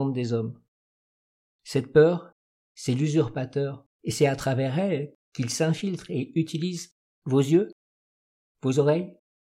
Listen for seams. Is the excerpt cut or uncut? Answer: cut